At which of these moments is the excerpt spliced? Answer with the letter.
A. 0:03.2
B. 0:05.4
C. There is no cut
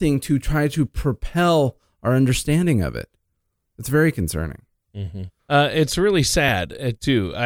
B